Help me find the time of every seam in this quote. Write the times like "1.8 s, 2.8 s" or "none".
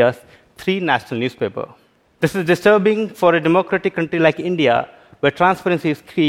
2.1 s